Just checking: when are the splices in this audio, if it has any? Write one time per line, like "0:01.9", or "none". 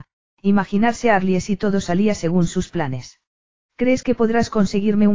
0:03.7